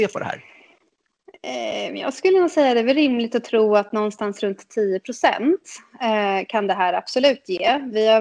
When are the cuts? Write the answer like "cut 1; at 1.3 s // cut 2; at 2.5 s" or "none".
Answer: none